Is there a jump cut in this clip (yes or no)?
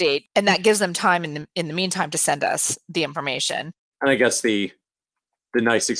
no